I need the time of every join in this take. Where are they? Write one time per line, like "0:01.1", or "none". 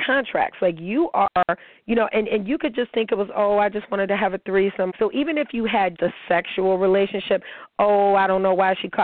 0:04.9
0:05.9